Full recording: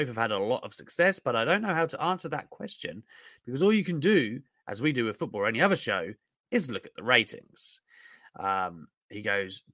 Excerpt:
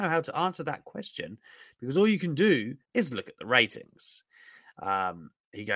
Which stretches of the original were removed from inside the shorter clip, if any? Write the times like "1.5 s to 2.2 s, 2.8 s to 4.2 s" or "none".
4.5 s to 6.4 s